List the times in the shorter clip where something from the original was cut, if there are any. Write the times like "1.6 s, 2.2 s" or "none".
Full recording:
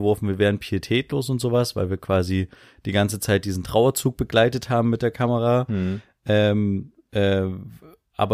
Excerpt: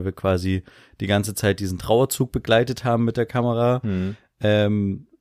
none